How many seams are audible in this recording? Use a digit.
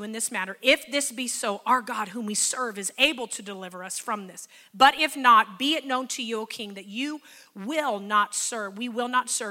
0